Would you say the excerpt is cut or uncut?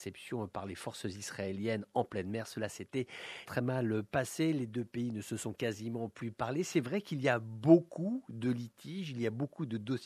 cut